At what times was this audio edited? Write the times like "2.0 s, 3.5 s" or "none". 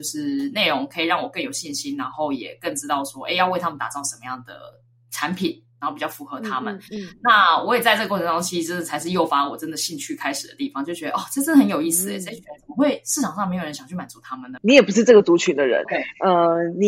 14.6 s, 15.9 s